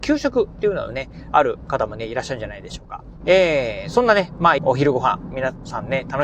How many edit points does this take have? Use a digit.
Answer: 2